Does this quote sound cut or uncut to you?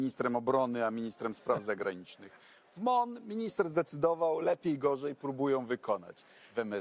uncut